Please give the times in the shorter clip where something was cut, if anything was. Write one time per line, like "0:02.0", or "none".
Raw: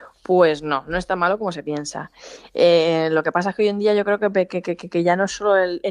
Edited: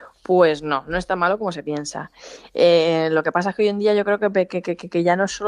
none

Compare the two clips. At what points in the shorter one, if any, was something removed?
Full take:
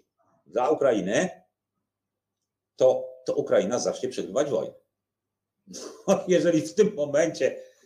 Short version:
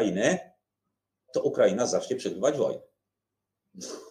0:01.3

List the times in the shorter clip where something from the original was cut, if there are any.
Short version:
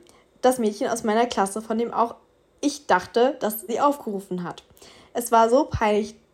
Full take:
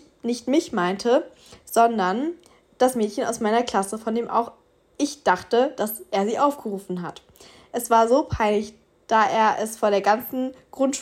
0:03.7

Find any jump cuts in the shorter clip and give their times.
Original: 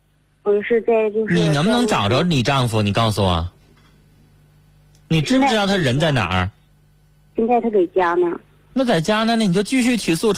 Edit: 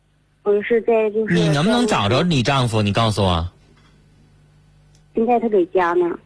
0:05.0

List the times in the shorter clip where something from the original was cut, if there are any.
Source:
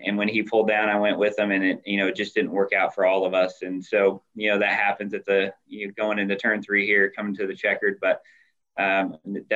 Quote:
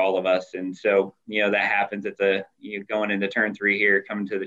none

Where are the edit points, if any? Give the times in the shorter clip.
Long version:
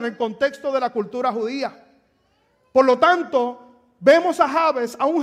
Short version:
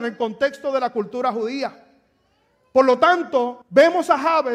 0:03.6

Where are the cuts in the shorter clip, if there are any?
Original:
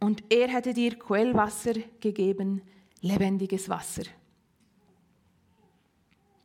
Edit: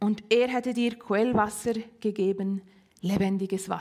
none

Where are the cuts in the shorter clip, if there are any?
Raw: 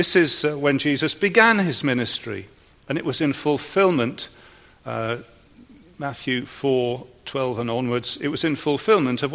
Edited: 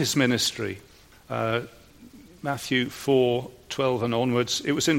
0:01.1

